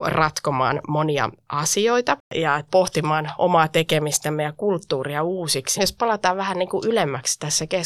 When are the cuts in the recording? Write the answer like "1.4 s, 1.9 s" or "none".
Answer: 5.8 s